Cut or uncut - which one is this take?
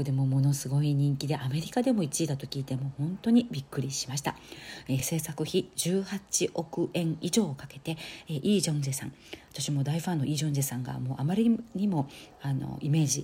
uncut